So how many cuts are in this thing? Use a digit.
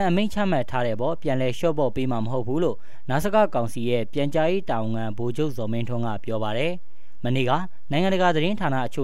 0